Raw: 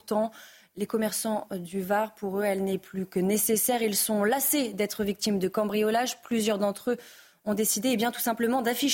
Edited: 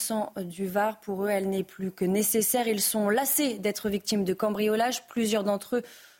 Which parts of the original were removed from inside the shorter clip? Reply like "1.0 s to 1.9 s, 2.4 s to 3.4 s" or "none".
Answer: none